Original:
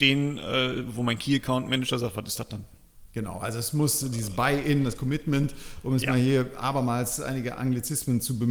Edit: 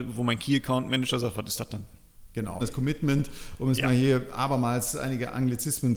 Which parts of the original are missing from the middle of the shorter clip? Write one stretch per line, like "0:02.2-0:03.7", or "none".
0:03.4-0:04.8